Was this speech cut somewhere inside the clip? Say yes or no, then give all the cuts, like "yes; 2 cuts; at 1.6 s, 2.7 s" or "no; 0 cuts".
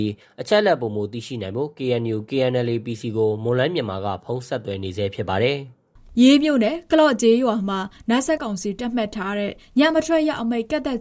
yes; 1 cut; at 8.4 s